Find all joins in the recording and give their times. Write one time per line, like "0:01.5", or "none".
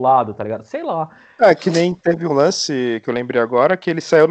none